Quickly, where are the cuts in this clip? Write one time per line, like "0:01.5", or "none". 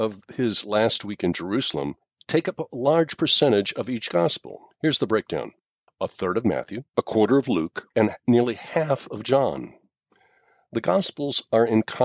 0:06.9